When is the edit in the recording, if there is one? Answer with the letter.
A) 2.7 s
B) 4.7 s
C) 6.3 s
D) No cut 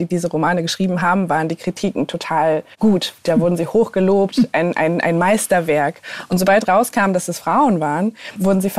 A